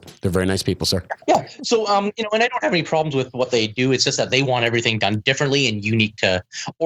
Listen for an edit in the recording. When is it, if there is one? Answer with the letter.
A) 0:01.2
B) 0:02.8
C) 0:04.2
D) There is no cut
A